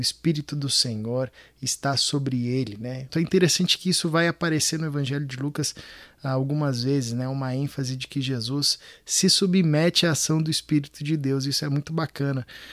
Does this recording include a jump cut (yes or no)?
yes